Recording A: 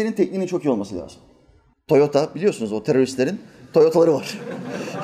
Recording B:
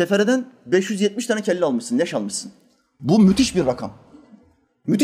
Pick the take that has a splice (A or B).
A